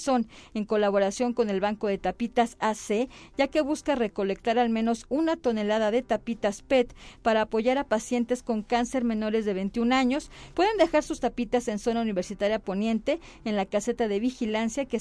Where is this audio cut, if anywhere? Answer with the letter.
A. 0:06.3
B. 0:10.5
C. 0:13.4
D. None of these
B